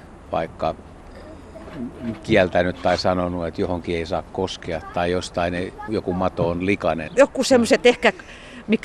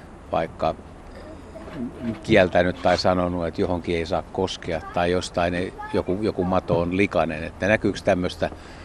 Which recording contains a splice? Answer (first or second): first